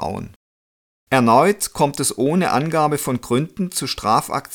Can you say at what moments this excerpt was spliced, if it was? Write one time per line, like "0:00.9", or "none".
0:00.9

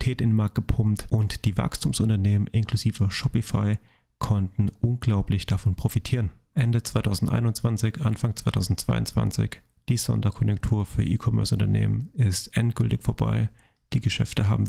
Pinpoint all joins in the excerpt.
none

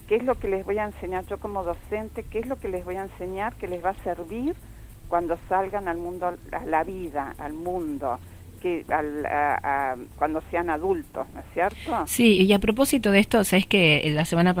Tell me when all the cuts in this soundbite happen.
none

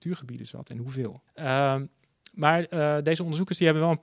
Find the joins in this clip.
0:01.3

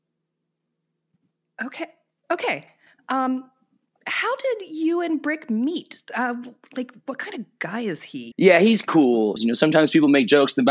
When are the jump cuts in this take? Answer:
0:08.3
0:09.4

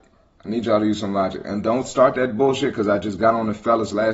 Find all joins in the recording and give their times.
none

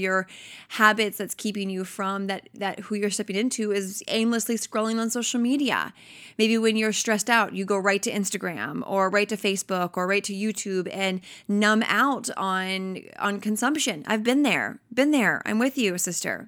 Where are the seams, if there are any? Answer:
none

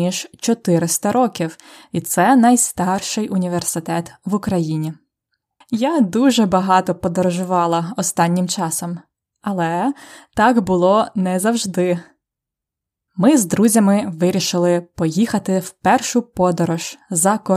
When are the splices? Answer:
0:05.6
0:13.1

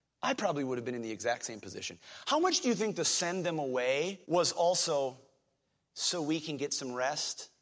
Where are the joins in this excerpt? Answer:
0:04.2

